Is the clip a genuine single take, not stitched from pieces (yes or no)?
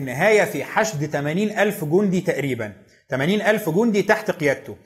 yes